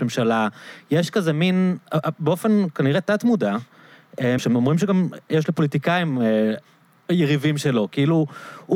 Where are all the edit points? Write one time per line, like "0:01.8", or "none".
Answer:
0:04.4